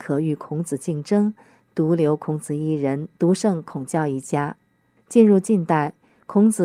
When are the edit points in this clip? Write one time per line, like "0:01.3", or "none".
0:05.0